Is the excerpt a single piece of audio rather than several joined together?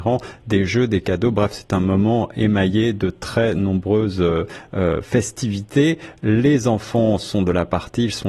yes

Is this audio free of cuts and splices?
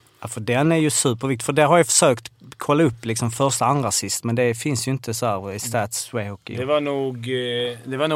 yes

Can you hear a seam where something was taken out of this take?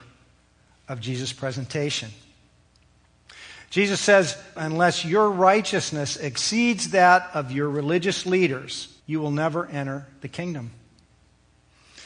yes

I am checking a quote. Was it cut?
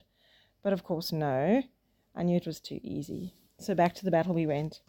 no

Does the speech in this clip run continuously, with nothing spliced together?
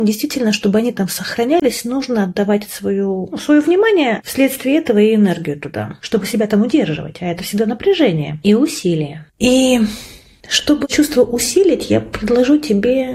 no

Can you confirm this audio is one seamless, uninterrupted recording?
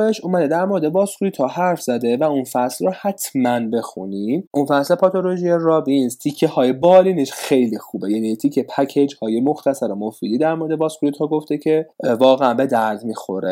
no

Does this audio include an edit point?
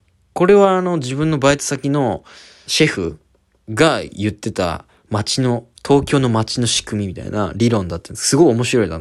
yes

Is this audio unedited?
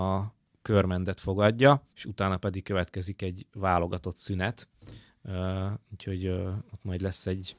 no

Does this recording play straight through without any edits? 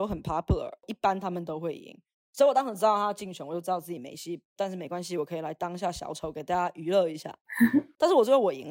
yes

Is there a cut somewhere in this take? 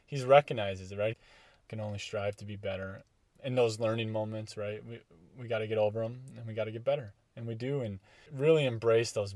yes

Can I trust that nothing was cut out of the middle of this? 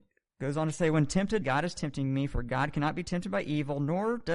no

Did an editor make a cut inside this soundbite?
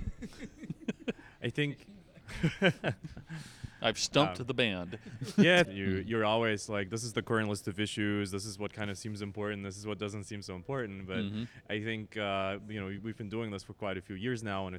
yes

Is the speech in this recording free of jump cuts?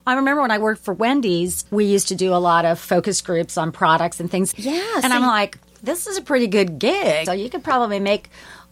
no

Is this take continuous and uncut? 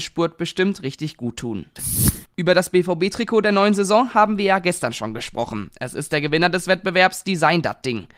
yes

